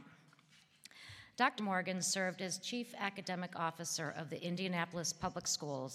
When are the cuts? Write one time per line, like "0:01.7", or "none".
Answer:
0:01.6